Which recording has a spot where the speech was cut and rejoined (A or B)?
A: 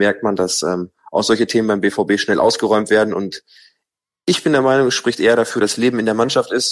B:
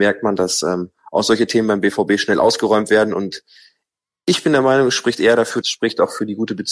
B